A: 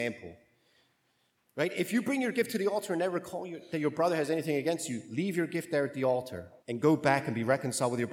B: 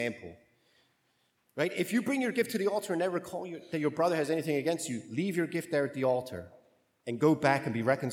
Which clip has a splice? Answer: A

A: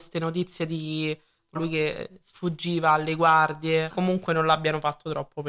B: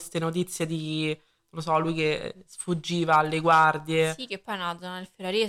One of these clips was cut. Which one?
A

